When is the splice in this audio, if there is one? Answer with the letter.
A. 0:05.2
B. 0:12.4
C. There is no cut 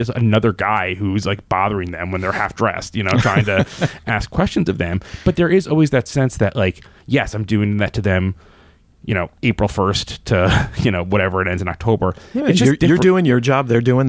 C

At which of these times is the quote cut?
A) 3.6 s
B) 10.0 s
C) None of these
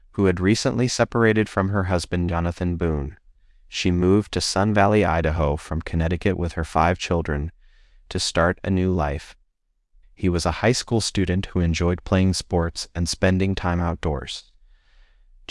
B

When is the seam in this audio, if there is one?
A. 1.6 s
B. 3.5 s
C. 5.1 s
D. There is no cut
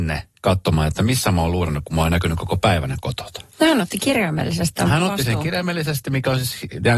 B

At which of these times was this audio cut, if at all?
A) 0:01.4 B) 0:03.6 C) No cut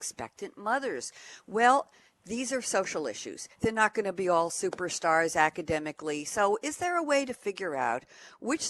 B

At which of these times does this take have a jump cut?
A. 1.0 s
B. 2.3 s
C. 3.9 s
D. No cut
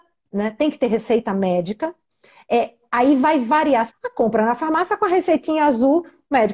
C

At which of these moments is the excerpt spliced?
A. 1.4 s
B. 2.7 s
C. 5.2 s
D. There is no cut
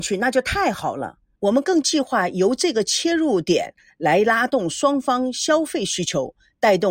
A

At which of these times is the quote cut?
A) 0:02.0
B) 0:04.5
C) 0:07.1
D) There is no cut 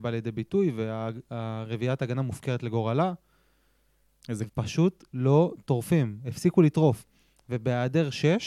B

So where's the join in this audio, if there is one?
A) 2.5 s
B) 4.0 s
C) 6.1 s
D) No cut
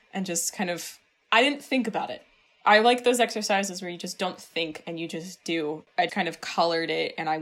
C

